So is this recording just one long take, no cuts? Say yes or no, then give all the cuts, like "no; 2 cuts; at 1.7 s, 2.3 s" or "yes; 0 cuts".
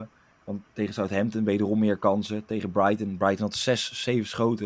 yes; 0 cuts